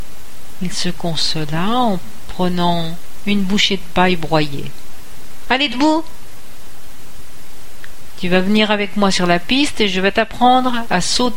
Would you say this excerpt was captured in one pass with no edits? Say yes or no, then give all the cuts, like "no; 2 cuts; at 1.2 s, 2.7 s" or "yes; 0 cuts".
no; 1 cut; at 5.5 s